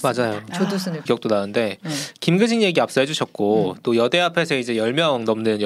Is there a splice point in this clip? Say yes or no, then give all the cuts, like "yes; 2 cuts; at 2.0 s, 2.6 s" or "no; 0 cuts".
yes; 1 cut; at 1.1 s